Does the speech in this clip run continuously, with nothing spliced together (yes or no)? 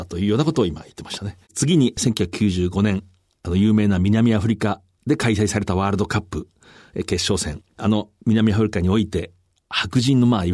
no